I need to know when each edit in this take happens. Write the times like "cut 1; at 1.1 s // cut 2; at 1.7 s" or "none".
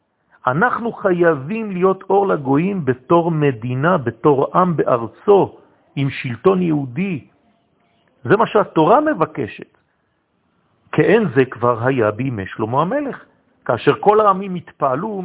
none